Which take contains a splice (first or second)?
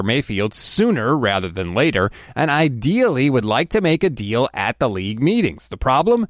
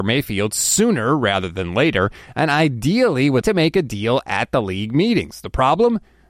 second